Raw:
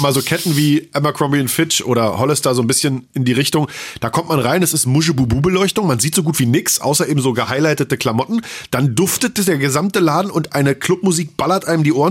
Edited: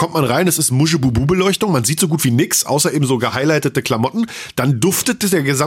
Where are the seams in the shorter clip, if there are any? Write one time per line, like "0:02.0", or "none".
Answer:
none